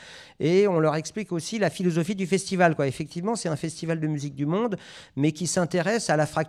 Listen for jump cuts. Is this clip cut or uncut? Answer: uncut